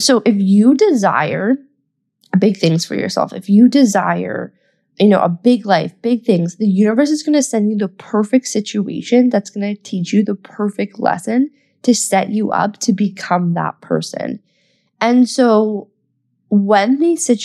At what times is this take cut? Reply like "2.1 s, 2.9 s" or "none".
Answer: none

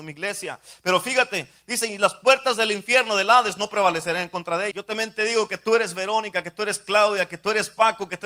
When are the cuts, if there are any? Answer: 4.7 s

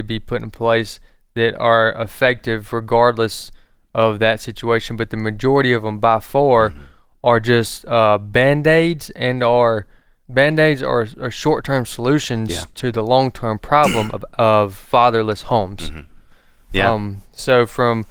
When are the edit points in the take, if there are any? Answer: 10.2 s

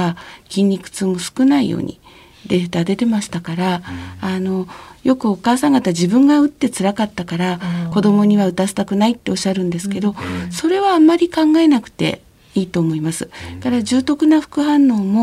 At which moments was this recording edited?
none

